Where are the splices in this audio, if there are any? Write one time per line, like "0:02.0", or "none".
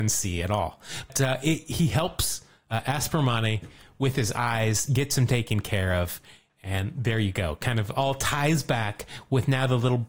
none